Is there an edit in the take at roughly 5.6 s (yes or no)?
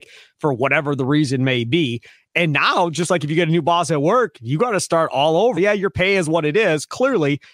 yes